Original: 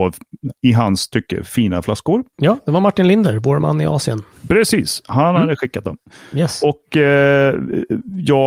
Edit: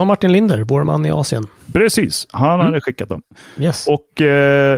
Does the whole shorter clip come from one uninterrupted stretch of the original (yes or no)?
yes